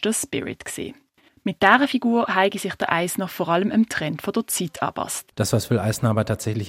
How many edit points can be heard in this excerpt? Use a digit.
1